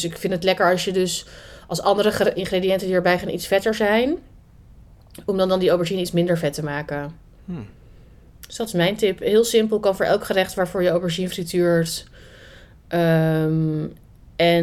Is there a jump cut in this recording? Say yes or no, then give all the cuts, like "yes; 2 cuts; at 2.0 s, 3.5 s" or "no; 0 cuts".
yes; 1 cut; at 2.4 s